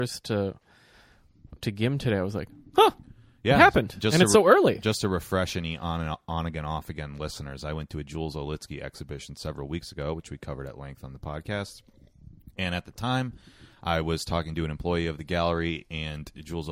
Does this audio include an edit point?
yes; 1 cut; at 1.6 s

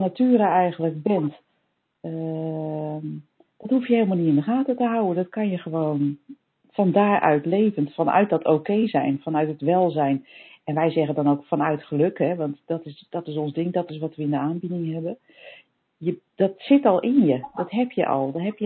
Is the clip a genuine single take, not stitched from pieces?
yes; 0 cuts

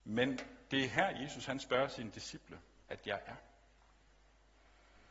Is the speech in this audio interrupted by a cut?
yes; 1 cut; at 2.9 s

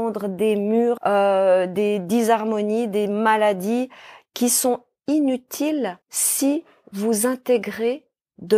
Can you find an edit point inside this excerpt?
yes; 2 cuts; at 1.0 s, 6.0 s

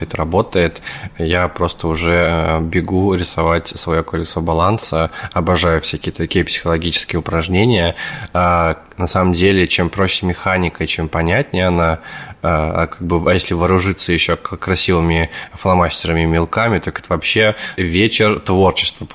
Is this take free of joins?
no; 1 cut; at 17.8 s

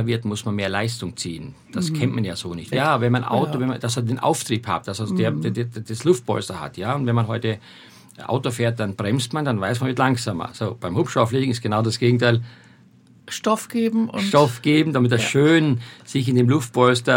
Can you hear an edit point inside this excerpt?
yes; 1 cut; at 2.7 s

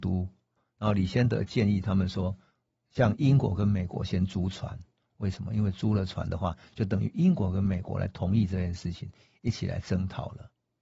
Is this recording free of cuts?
yes; 0 cuts

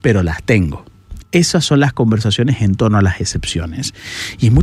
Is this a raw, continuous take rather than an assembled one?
no; 1 cut; at 1.2 s

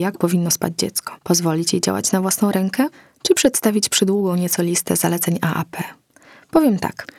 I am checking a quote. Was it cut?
yes; 1 cut; at 1.2 s

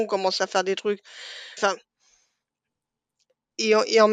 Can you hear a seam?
yes; 1 cut; at 1.6 s

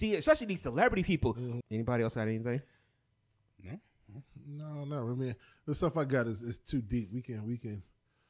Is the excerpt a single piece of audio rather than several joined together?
no; 1 cut; at 1.6 s

